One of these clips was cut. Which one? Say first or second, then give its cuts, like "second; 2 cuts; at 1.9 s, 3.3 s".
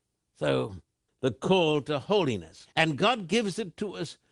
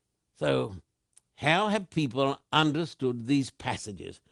first; 2 cuts; at 1.1 s, 2.7 s